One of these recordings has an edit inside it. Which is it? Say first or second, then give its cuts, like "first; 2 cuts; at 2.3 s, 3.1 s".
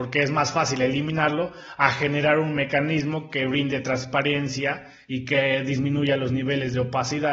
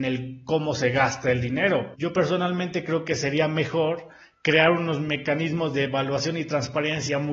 second; 1 cut; at 1.9 s